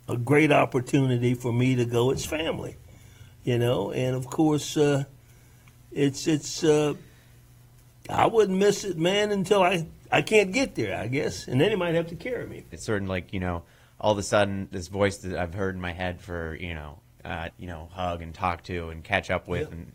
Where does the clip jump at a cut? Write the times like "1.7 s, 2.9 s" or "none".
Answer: 12.7 s, 17.5 s

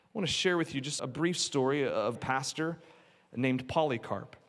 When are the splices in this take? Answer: 1.0 s, 2.2 s

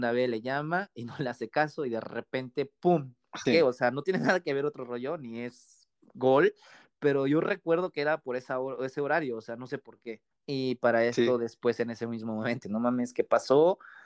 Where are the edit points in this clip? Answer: 3.5 s, 10.3 s, 12.6 s

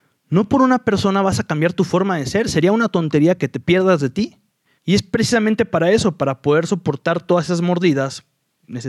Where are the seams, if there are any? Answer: 4.8 s

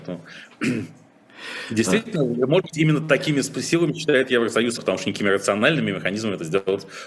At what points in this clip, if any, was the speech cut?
4.8 s

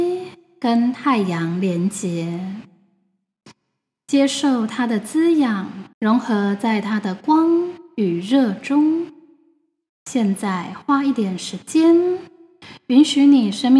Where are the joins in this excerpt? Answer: 5.9 s, 9.9 s

